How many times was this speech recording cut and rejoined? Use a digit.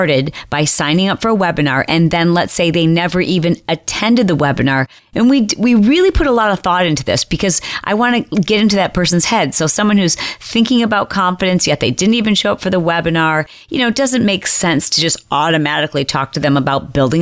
1